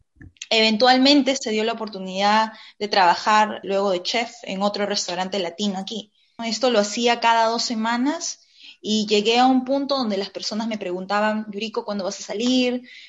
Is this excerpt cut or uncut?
cut